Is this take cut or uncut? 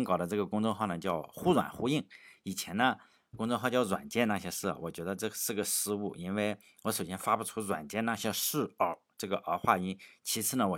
uncut